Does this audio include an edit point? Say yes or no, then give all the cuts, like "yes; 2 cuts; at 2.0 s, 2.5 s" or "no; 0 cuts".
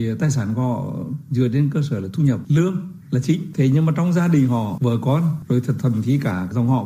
no; 0 cuts